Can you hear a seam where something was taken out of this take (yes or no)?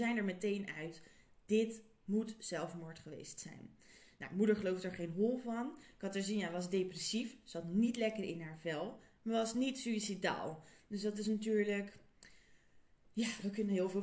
no